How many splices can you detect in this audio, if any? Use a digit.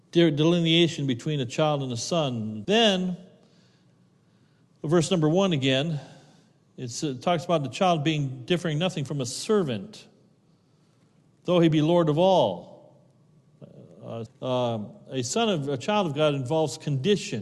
2